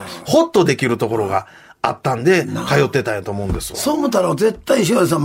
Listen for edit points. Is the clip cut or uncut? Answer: uncut